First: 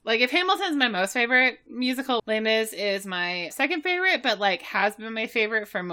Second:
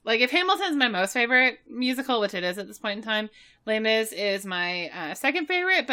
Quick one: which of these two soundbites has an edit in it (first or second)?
first